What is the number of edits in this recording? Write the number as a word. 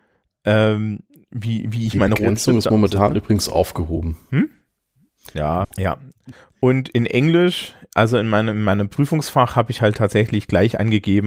one